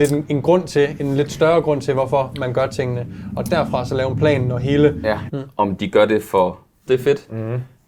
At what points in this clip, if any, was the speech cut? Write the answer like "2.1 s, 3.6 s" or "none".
5.3 s, 6.9 s

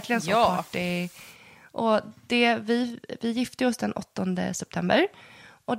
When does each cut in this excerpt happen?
none

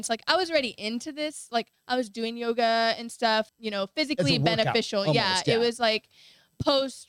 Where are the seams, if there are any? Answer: 3.5 s

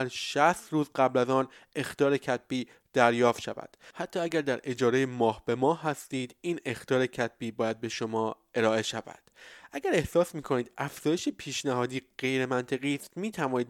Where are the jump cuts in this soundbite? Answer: none

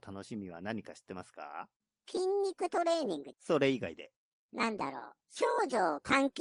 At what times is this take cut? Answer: 5.2 s

